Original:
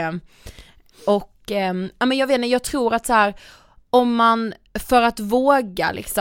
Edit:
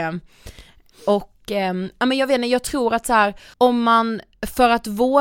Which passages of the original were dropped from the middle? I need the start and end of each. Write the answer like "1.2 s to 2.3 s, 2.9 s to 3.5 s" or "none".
3.5 s to 3.9 s